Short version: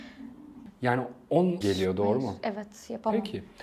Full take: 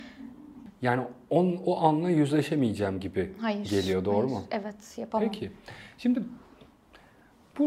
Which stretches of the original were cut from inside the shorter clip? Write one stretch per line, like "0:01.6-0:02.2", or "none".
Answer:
0:01.6-0:03.7